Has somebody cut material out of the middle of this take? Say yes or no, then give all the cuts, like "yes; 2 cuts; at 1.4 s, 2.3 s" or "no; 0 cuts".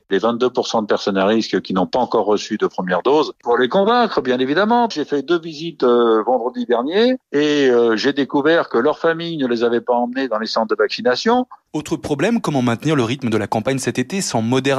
yes; 3 cuts; at 4.9 s, 7.2 s, 11.7 s